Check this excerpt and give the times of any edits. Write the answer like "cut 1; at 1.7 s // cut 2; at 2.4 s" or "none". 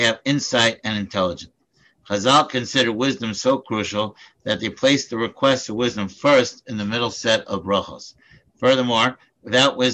none